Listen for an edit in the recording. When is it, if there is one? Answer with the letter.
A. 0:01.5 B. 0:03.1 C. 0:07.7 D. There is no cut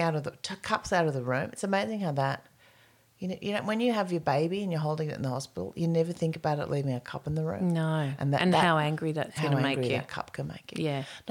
D